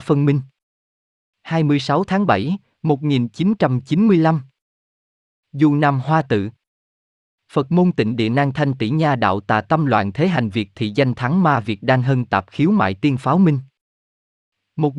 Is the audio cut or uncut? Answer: uncut